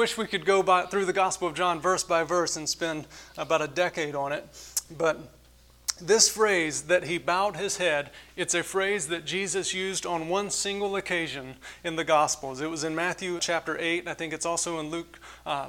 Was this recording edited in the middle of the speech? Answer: yes; 1 cut; at 13.4 s

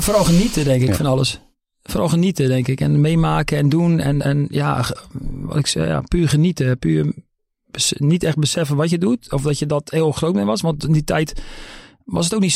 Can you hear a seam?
no; 0 cuts

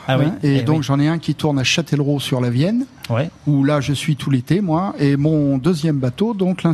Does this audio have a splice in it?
no; 0 cuts

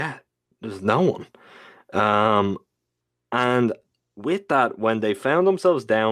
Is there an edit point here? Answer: no; 0 cuts

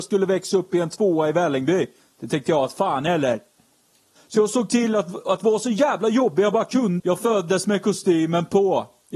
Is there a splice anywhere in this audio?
yes; 2 cuts; at 4.2 s, 7.0 s

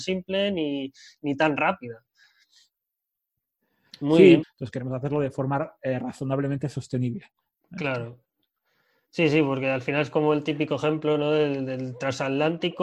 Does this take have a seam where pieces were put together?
yes; 1 cut; at 4.4 s

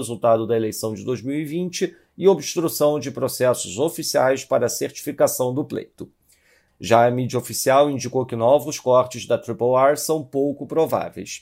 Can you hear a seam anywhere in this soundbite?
yes; 1 cut; at 6.7 s

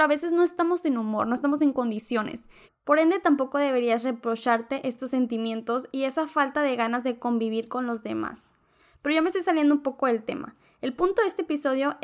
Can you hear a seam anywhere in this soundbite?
yes; 1 cut; at 2.7 s

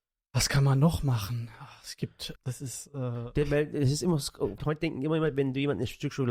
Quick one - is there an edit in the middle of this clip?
yes; 2 cuts; at 2.4 s, 4.6 s

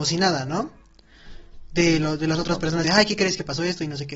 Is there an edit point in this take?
yes; 1 cut; at 2.8 s

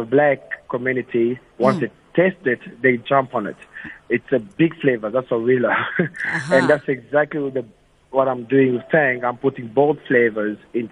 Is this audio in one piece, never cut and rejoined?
yes; 0 cuts

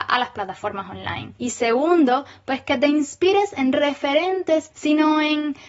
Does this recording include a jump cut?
yes; 2 cuts; at 1.3 s, 4.7 s

